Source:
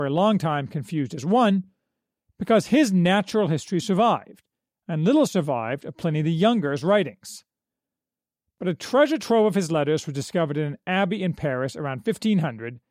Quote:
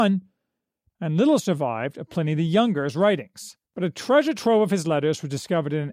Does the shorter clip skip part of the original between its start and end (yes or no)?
yes